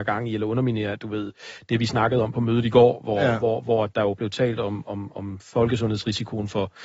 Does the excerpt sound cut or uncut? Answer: cut